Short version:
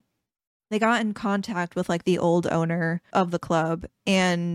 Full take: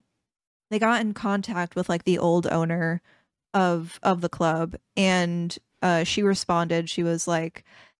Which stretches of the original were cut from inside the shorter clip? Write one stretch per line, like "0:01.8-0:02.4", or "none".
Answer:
0:03.1-0:04.0